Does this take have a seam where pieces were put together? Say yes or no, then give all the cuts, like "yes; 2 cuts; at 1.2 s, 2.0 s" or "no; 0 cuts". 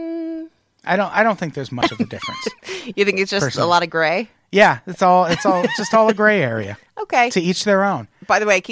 no; 0 cuts